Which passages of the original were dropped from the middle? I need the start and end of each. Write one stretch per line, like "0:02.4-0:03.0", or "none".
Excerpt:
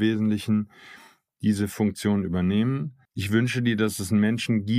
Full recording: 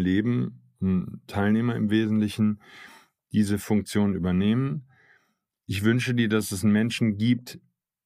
0:05.0-0:05.6